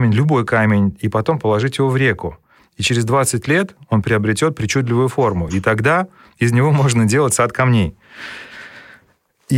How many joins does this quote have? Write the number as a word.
zero